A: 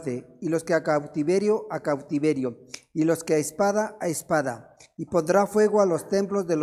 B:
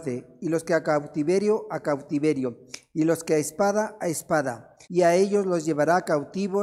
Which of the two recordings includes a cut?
B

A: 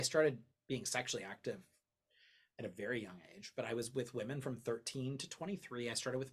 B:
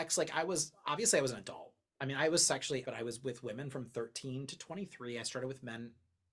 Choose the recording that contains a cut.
B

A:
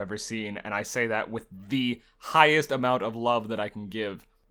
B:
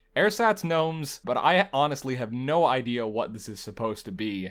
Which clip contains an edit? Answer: B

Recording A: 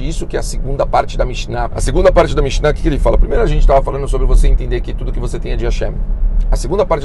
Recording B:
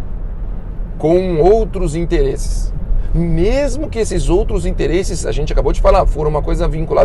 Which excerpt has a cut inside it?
A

